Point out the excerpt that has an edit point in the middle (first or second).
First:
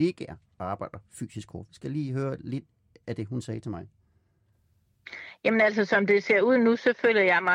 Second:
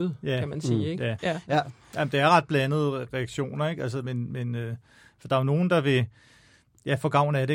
second